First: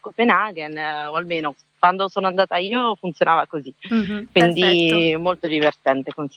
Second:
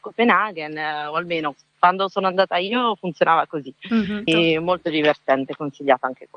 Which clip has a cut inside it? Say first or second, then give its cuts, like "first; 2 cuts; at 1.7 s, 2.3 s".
second; 1 cut; at 4.3 s